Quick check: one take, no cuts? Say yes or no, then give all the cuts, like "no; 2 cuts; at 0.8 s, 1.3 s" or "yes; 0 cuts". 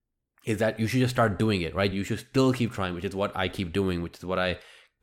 no; 1 cut; at 1.9 s